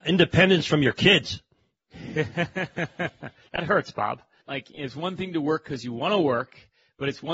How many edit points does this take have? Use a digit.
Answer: 1